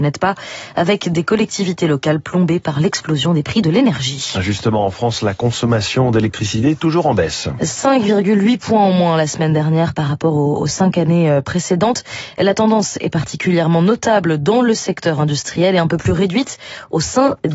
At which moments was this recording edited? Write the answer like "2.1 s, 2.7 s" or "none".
none